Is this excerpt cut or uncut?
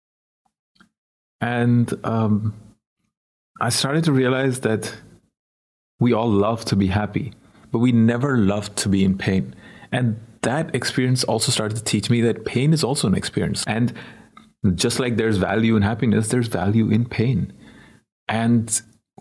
cut